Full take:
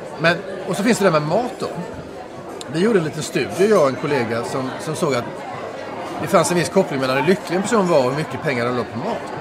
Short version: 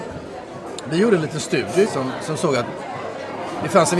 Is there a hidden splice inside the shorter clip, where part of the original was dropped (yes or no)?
yes